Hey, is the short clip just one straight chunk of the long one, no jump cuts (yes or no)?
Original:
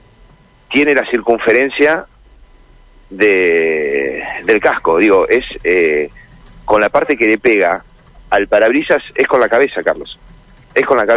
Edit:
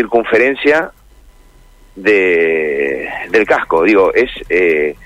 yes